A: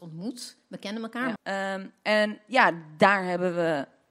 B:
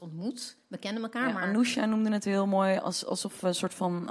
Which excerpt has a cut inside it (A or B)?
A